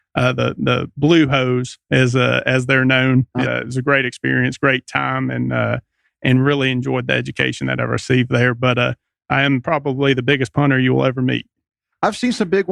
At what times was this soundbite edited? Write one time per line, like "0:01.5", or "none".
0:03.4